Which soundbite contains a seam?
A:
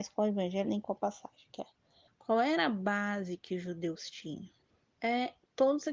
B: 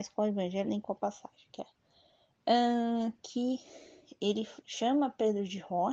A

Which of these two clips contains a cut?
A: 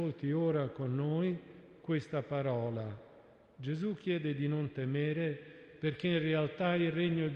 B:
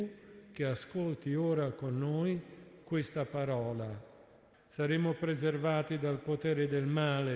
B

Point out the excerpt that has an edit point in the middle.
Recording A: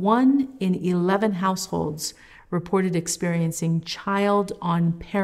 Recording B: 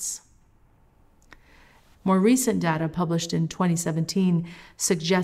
B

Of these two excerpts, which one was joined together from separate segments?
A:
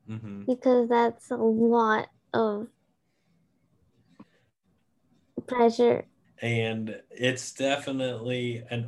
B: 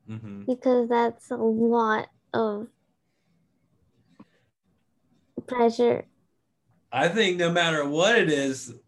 A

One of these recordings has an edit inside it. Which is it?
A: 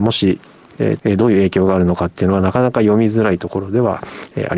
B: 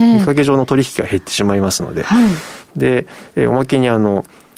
A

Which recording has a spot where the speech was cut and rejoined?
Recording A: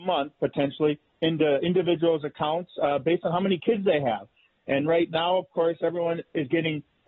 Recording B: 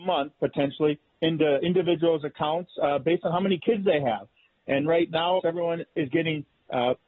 B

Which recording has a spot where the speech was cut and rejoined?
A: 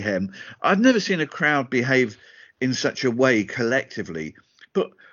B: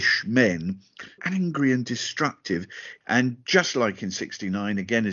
B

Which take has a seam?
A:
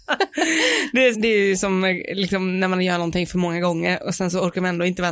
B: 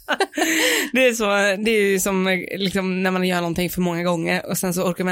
A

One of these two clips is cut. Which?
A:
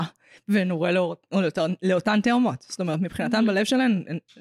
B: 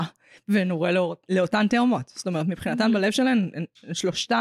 B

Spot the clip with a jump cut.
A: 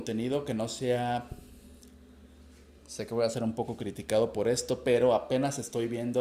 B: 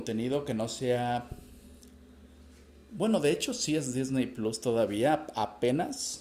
A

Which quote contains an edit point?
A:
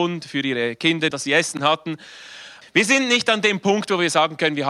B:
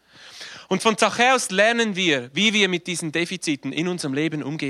A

